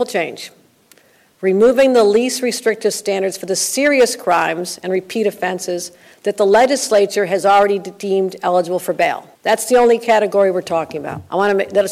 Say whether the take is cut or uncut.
cut